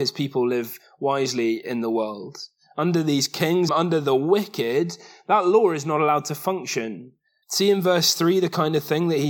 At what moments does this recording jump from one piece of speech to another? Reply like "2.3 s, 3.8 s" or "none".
3.7 s, 7.4 s